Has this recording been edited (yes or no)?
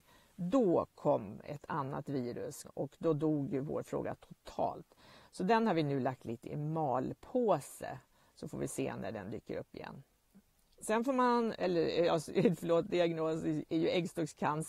yes